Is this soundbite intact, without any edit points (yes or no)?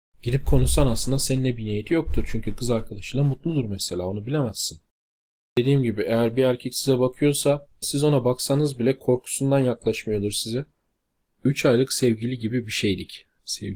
no